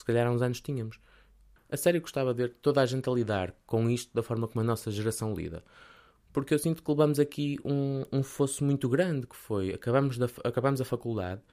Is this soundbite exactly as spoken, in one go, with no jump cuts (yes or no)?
no